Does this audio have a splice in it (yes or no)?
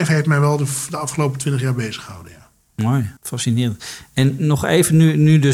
yes